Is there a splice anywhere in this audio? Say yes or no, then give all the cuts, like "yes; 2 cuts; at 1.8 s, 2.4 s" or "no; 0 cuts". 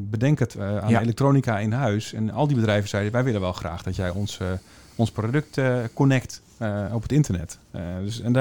no; 0 cuts